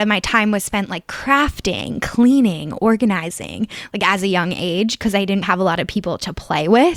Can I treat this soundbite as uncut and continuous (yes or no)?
no